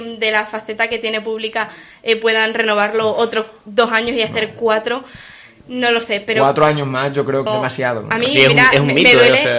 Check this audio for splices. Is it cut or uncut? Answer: cut